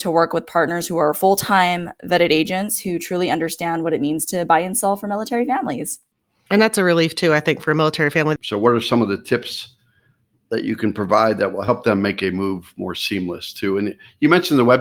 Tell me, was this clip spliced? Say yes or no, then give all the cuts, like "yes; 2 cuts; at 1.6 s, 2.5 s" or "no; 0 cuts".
yes; 1 cut; at 8.4 s